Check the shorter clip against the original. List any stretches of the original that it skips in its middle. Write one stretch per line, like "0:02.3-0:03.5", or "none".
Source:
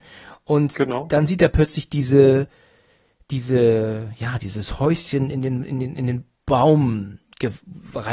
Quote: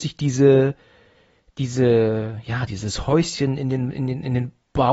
none